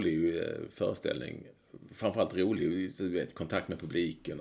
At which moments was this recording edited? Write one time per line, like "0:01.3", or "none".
none